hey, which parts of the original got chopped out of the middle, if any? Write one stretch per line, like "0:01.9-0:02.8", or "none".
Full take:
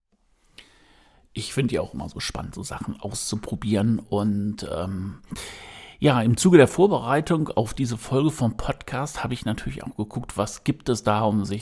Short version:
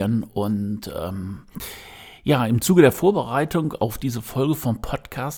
none

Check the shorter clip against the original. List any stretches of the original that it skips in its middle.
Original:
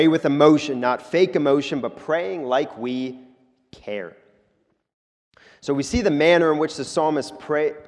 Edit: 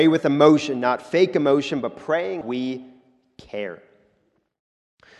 0:02.4-0:02.7

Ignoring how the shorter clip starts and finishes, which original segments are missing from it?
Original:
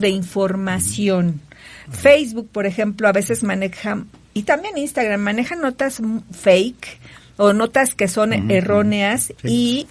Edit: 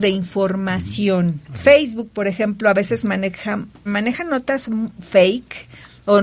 0:01.4-0:01.8
0:04.2-0:05.2

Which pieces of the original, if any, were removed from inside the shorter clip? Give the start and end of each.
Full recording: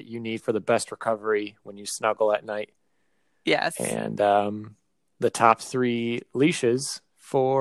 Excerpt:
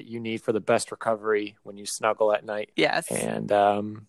0:02.7-0:03.4

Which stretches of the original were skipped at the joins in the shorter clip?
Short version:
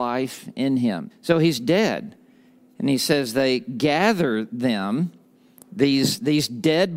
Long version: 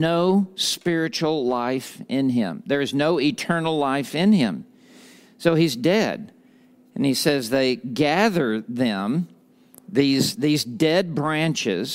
0:02.6-0:05.3

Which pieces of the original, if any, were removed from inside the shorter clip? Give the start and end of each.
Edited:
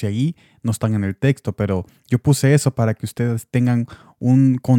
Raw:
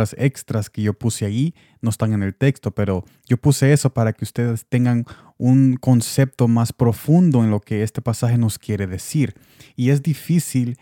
none

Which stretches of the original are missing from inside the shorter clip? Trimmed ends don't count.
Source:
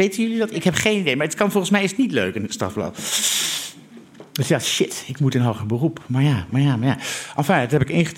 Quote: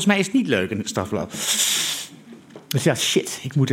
none

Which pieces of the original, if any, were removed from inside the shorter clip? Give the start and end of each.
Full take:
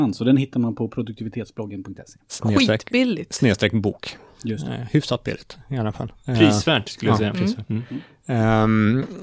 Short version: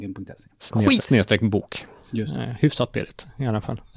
0:02.7-0:03.3

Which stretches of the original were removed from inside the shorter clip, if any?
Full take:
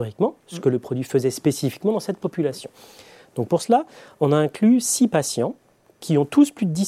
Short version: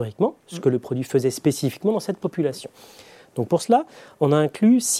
none

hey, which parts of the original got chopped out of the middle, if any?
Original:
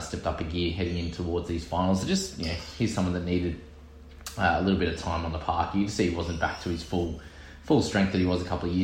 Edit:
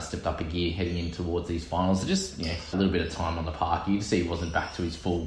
0:02.7-0:04.6

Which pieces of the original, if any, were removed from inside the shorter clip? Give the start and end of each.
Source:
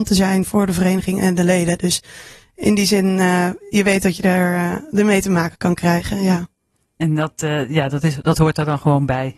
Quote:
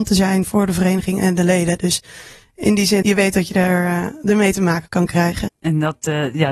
0:03.0-0:03.7
0:06.2-0:06.8

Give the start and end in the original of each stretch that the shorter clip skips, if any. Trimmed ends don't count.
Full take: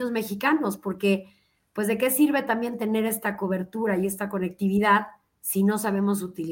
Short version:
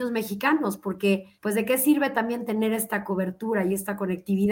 0:01.3-0:01.7

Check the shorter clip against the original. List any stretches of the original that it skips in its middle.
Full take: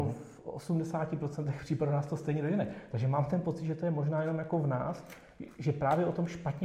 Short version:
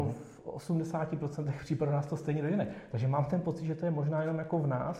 none

